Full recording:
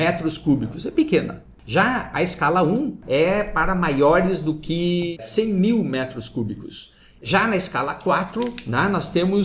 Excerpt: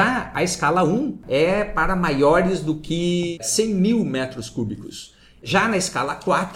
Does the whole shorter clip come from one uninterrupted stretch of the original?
yes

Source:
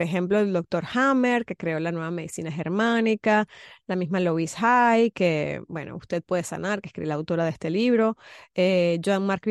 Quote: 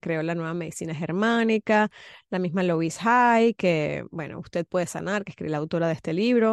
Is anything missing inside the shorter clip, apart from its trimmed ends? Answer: no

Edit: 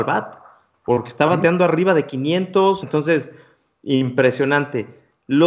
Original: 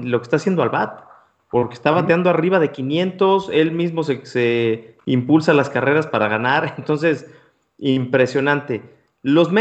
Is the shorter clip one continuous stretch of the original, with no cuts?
no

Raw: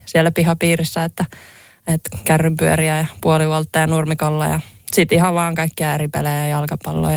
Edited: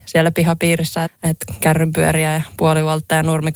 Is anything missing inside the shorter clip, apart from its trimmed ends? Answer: yes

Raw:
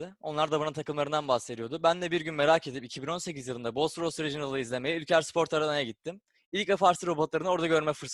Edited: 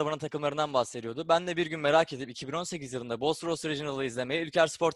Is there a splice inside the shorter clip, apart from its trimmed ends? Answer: no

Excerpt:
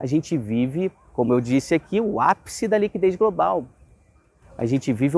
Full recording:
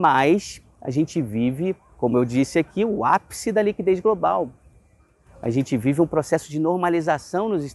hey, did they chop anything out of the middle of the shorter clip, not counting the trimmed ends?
no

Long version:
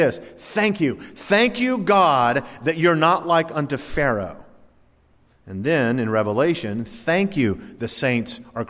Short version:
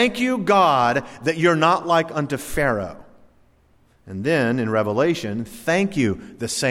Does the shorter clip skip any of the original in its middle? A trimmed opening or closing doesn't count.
no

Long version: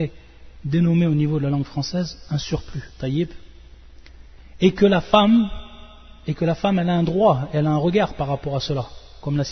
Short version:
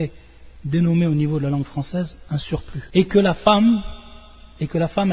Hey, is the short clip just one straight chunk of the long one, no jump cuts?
no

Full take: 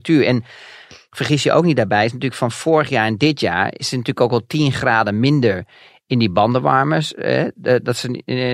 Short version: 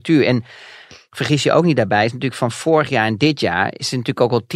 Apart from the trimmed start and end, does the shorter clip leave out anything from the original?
no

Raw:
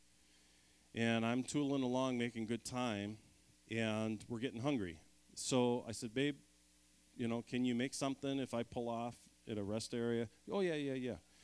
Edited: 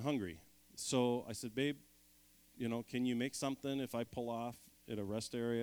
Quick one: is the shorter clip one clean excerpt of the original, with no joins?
yes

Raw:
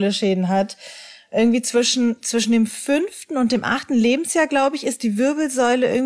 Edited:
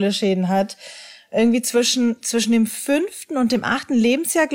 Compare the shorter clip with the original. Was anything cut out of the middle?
no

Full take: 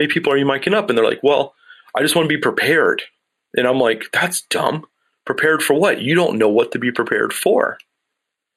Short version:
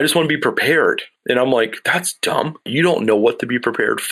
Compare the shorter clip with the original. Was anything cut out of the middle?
yes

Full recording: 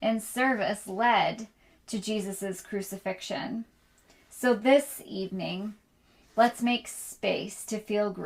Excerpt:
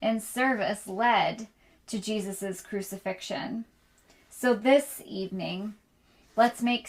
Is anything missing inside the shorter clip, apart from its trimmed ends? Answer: no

